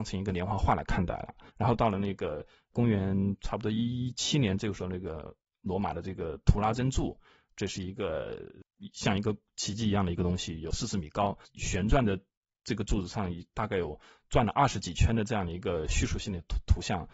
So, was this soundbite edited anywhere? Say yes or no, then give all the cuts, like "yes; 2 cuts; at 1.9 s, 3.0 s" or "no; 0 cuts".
yes; 2 cuts; at 1.5 s, 11.5 s